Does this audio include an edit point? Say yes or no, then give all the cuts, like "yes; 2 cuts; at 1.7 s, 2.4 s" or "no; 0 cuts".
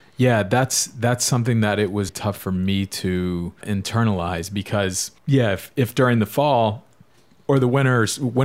yes; 3 cuts; at 2.1 s, 3.6 s, 5.2 s